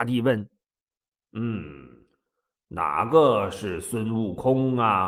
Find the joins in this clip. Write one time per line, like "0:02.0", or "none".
none